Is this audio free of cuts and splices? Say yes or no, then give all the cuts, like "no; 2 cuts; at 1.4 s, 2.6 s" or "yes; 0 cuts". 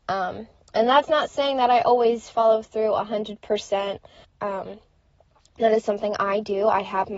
no; 1 cut; at 4.2 s